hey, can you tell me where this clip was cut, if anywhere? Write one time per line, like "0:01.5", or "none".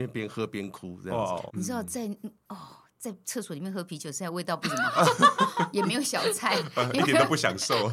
0:01.5